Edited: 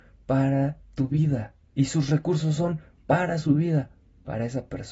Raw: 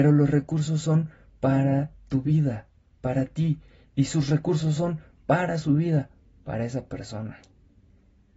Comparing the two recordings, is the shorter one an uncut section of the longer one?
no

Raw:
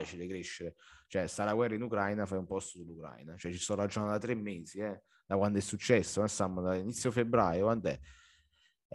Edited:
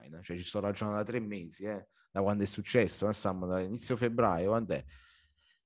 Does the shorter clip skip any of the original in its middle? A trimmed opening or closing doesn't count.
no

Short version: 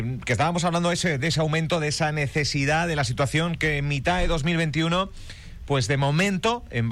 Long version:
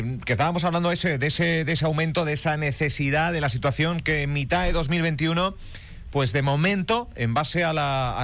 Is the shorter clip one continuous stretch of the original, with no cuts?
no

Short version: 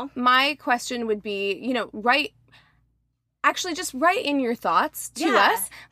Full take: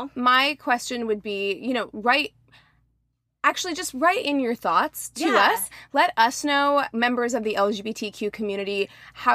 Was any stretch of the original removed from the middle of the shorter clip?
no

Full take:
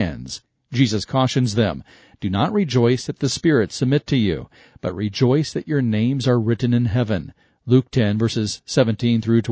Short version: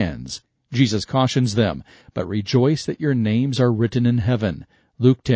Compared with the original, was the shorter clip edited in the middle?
yes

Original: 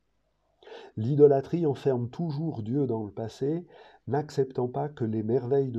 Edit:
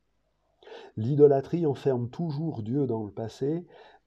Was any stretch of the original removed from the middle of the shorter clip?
no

